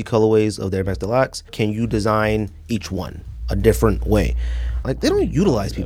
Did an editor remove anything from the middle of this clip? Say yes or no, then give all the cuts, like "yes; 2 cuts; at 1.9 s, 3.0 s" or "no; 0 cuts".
yes; 2 cuts; at 1.5 s, 4.8 s